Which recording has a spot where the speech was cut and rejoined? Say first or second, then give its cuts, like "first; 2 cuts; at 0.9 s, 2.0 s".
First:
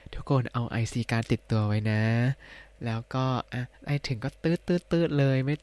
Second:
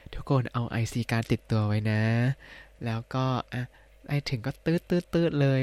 first; 1 cut; at 3.7 s